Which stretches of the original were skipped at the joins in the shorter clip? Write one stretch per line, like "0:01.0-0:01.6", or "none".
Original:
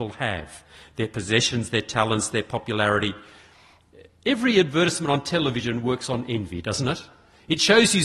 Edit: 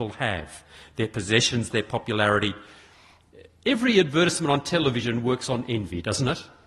0:01.7-0:02.3